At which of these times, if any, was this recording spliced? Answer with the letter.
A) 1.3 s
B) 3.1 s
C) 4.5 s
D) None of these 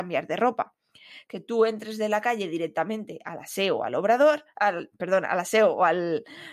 A